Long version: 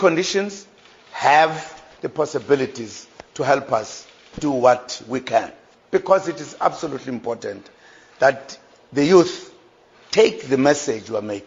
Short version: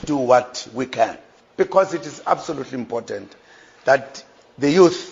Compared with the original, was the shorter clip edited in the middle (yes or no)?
no